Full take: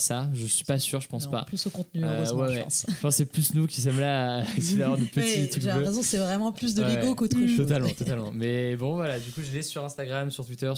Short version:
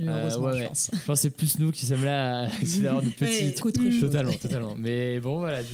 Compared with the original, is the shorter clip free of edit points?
no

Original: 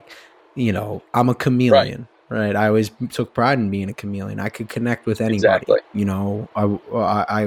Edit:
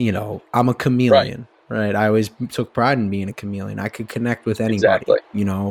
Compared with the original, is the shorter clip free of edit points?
yes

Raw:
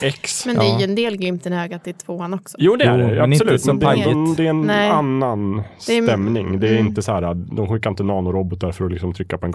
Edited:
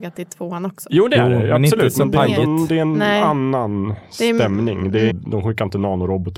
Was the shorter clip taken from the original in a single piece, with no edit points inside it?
no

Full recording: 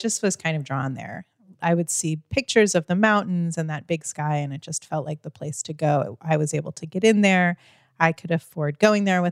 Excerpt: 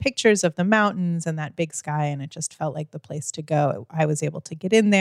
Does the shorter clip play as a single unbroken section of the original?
yes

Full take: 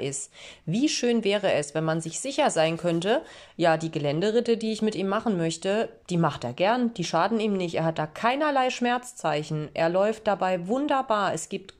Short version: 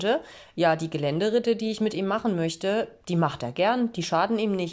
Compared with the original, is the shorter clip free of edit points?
yes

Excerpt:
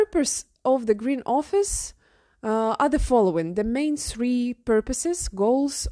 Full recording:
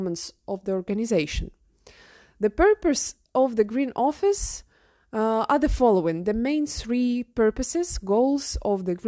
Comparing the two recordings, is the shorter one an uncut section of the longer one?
yes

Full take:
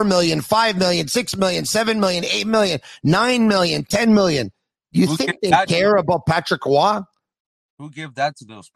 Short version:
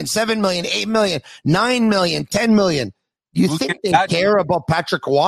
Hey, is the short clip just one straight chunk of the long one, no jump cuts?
yes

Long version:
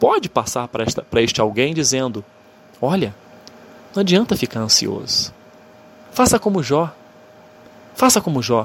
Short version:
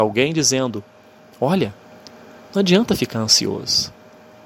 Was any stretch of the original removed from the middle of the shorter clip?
no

